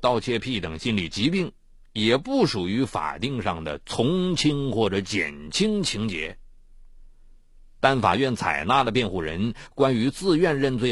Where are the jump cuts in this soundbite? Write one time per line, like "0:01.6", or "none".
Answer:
0:07.8